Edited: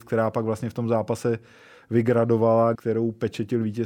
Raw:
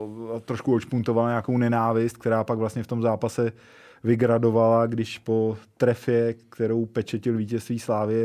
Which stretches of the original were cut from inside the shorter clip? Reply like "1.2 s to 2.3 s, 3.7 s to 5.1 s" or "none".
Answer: 4.9 s to 6.5 s